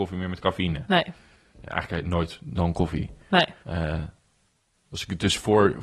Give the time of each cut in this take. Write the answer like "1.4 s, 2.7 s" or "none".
3.6 s